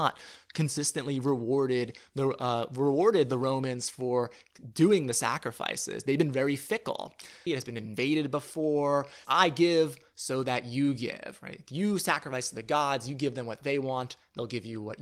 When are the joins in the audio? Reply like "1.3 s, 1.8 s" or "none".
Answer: 7.5 s, 9.2 s